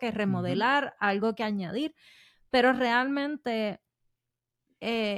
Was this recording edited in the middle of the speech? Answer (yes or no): no